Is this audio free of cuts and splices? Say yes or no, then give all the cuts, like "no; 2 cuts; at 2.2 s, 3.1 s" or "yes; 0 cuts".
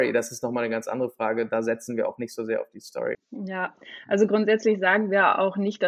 no; 1 cut; at 3.1 s